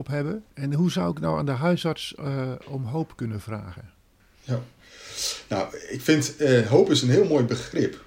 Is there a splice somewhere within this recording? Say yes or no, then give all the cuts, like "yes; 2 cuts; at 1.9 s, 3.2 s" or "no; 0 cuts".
no; 0 cuts